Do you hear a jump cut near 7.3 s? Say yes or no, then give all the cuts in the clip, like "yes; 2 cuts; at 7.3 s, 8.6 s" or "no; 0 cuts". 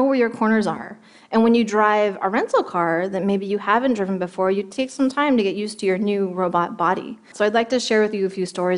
yes; 1 cut; at 7.3 s